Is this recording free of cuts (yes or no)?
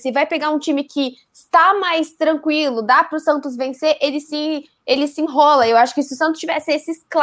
yes